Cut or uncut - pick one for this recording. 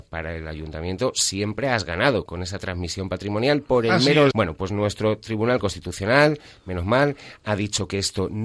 cut